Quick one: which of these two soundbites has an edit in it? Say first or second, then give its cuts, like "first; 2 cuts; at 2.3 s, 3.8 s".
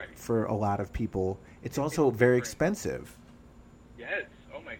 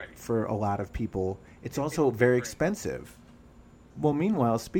second; 1 cut; at 3.9 s